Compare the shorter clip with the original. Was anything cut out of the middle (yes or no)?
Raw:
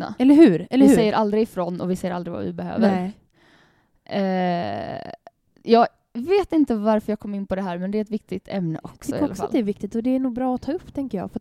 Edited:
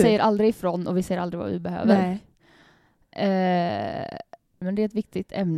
yes